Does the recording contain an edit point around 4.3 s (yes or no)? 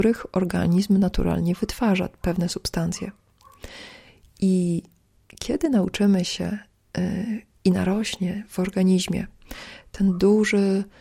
no